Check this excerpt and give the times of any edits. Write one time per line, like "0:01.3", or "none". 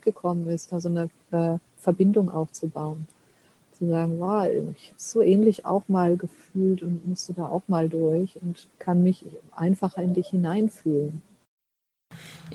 0:08.7